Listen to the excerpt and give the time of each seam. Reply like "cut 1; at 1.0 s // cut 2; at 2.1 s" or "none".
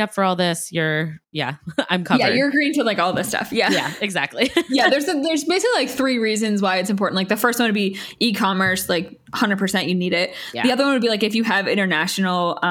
none